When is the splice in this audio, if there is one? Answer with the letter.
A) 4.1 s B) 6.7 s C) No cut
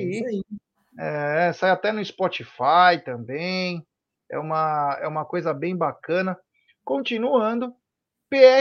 C